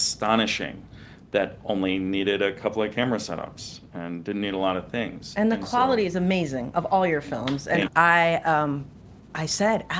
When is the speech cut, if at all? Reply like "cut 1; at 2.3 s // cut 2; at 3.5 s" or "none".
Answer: cut 1; at 7.9 s

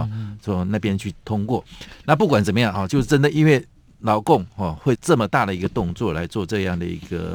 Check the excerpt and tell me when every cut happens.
none

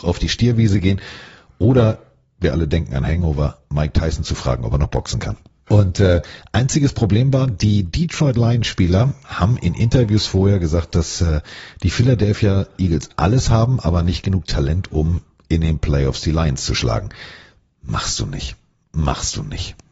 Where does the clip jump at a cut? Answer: cut 1; at 5.7 s

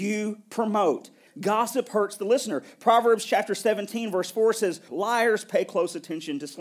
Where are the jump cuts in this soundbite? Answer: cut 1; at 1.3 s // cut 2; at 4.9 s

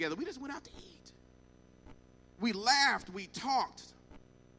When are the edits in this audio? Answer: none

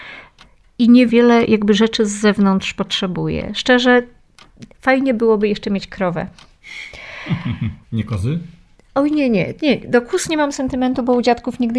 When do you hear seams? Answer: cut 1; at 7.8 s

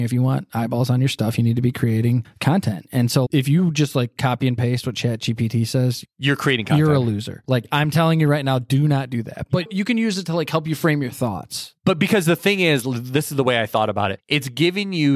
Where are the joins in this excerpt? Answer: cut 1; at 3.2 s

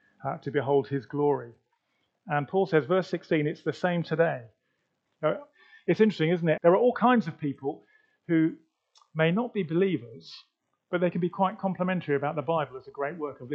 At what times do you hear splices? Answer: cut 1; at 5.1 s // cut 2; at 6.6 s

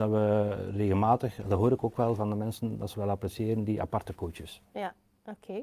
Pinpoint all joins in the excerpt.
none

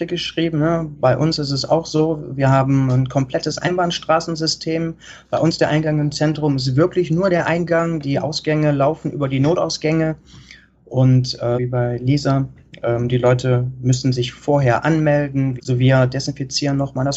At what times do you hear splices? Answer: cut 1; at 11.6 s // cut 2; at 15.6 s

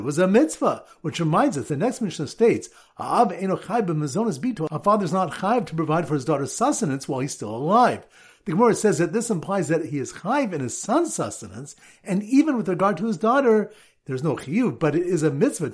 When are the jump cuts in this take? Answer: none

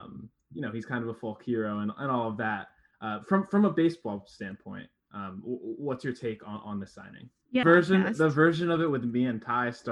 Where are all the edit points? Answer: cut 1; at 7.6 s

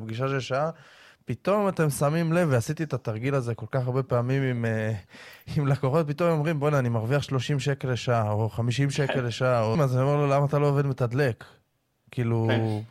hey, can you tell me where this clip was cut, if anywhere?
cut 1; at 9.7 s

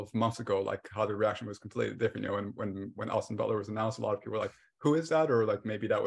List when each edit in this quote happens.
none

